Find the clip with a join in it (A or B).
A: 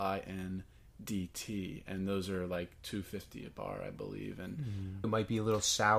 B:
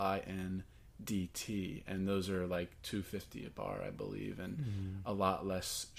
A